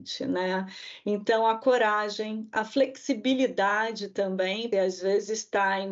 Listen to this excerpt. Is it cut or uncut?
cut